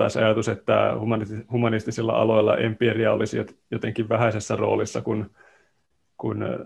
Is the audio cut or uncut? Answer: uncut